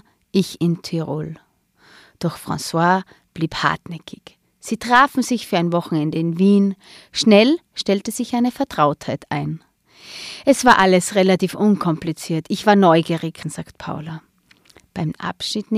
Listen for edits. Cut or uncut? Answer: cut